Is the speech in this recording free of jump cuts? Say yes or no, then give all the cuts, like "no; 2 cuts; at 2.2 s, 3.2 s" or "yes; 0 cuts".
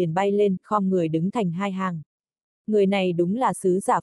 yes; 0 cuts